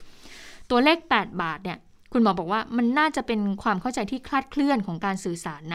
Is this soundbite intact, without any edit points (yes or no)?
yes